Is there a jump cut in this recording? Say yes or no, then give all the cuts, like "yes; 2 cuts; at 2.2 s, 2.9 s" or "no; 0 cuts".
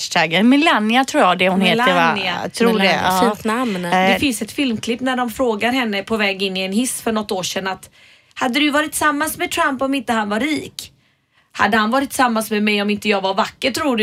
no; 0 cuts